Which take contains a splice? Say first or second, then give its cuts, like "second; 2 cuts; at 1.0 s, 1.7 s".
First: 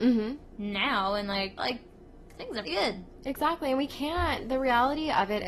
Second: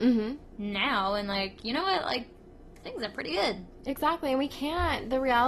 first; 2 cuts; at 1.6 s, 2.6 s